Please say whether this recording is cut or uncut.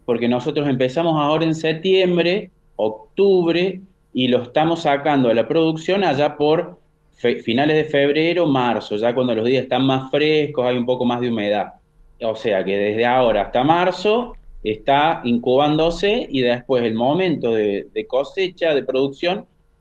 uncut